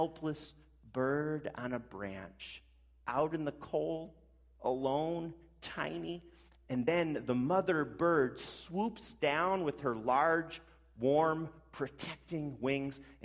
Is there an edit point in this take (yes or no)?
no